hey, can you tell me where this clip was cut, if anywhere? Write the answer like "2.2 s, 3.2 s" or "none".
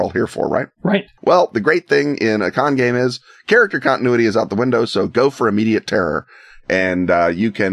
1.2 s